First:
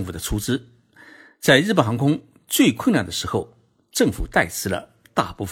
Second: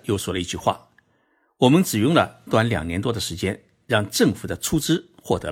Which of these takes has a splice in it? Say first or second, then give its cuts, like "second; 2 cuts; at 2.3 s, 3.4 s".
second; 1 cut; at 2.5 s